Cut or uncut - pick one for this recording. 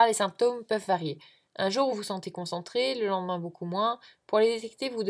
uncut